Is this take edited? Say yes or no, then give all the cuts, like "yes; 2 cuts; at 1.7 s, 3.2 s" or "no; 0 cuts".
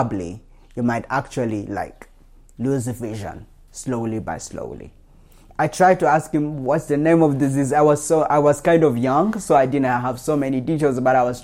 no; 0 cuts